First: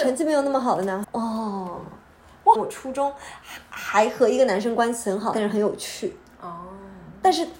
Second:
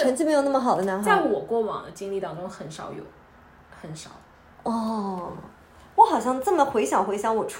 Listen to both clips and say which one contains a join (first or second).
first